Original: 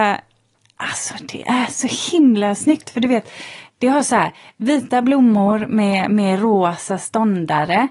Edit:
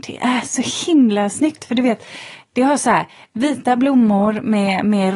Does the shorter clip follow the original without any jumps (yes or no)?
yes